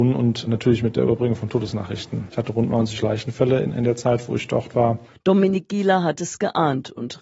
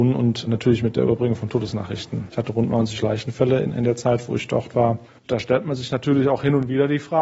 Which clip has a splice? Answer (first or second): first